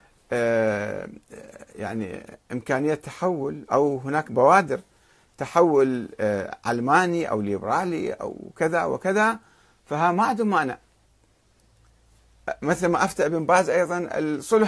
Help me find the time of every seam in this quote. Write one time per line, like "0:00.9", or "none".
none